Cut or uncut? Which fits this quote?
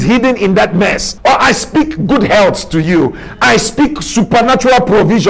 cut